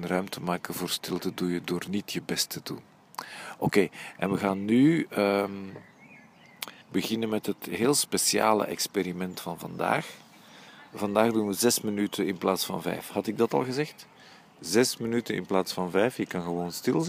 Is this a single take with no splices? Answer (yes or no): no